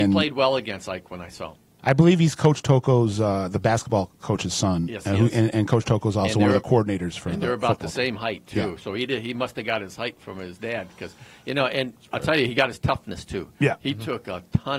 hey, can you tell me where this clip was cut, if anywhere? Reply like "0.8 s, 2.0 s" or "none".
1.8 s

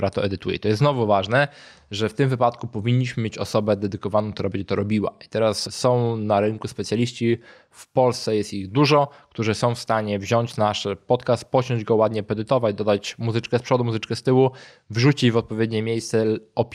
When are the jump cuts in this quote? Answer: none

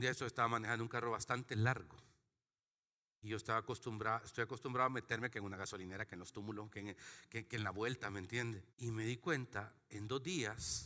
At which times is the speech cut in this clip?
8.7 s

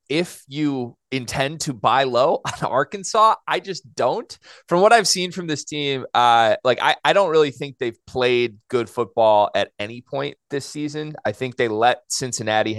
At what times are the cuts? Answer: none

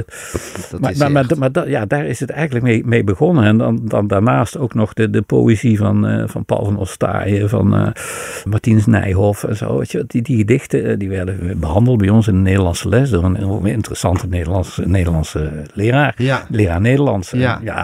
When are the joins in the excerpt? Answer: 8.5 s

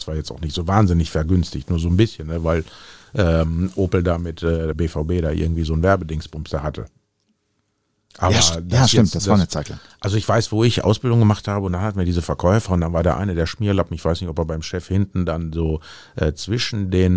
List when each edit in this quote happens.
4.7 s

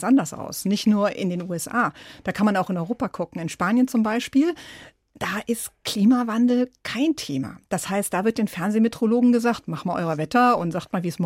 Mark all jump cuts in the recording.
none

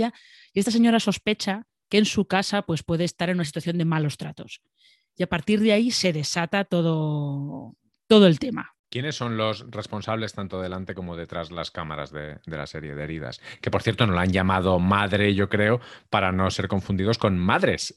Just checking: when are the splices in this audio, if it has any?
none

